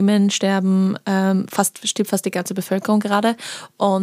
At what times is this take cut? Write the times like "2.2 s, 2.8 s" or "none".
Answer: none